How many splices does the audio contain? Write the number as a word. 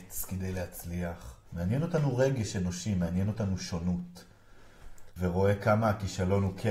two